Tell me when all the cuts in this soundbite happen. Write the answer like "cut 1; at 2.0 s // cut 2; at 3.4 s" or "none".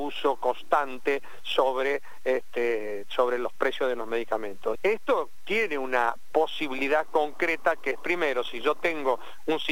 cut 1; at 4.8 s

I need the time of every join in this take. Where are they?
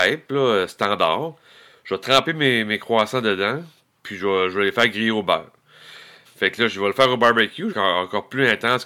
cut 1; at 6.2 s // cut 2; at 7.7 s

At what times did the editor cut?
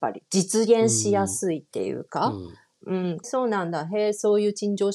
cut 1; at 3.2 s

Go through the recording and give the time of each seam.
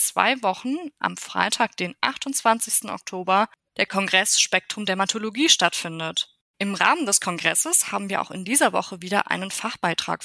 cut 1; at 6.4 s

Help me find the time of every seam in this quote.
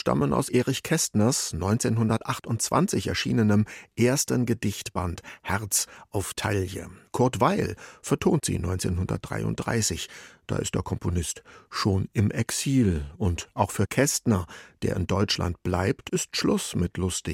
none

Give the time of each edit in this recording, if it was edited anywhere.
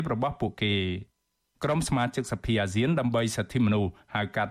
none

